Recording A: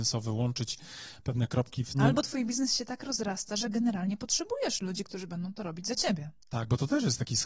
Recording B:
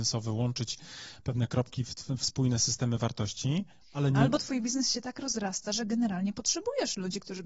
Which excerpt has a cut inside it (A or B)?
A